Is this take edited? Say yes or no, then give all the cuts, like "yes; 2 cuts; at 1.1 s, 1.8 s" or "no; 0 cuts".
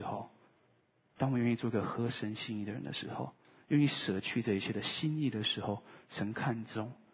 no; 0 cuts